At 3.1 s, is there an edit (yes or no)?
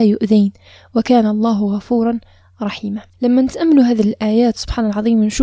yes